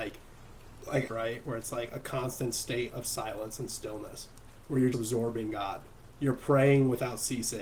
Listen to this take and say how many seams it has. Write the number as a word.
two